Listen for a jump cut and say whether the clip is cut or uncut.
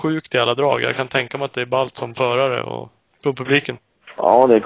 cut